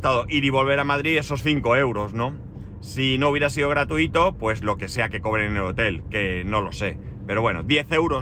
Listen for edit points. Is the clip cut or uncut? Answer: uncut